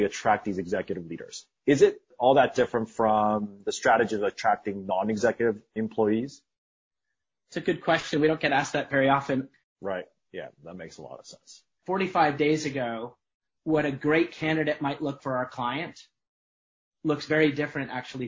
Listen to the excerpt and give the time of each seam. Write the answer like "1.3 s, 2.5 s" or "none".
9.6 s, 11.8 s, 15.2 s